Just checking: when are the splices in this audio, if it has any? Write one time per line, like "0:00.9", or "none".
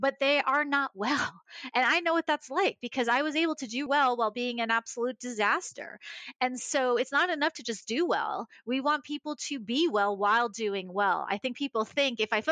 0:03.9